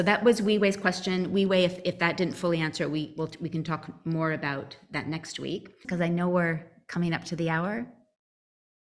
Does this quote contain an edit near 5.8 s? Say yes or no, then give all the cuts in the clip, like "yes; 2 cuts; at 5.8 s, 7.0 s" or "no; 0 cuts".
yes; 1 cut; at 5.8 s